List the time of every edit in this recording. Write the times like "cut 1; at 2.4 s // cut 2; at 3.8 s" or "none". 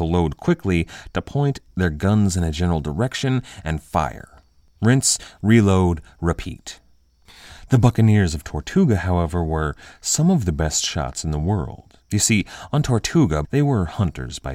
cut 1; at 12.0 s // cut 2; at 13.4 s